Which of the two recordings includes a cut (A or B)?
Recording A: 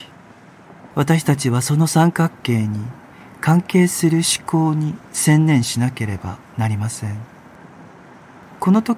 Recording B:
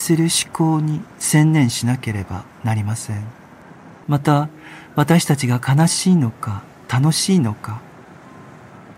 B